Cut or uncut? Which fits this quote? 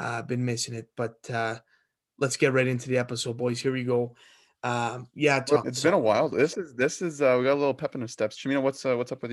cut